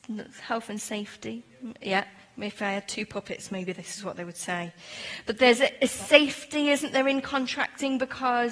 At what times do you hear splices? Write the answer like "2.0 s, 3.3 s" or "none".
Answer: none